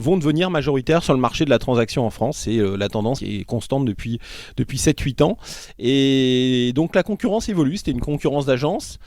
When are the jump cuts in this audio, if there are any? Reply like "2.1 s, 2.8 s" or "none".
none